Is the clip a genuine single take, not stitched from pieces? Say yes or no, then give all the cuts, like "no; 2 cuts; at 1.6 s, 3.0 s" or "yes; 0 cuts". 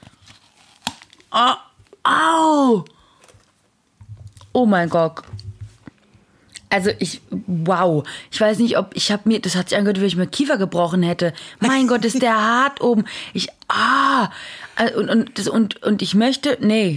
yes; 0 cuts